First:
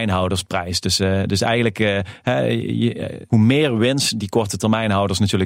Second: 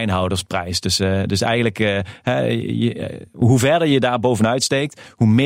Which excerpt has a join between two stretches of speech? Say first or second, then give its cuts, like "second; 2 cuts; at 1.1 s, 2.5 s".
first; 1 cut; at 3.3 s